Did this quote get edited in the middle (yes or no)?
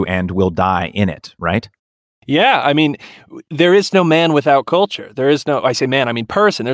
no